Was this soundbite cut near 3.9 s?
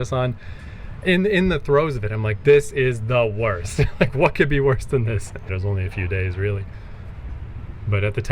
no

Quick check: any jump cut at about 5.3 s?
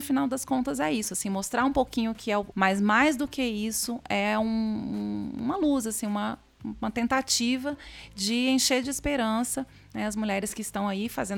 no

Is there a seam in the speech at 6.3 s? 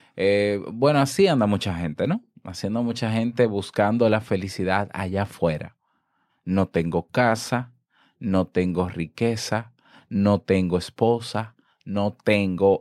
yes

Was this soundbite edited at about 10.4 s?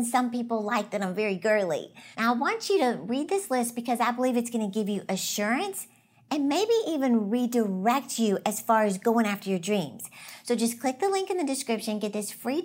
no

